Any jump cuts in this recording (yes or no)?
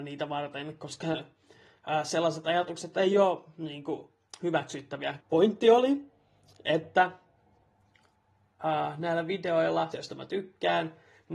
yes